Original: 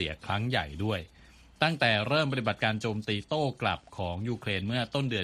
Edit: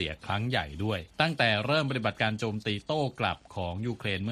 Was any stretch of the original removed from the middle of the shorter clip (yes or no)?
yes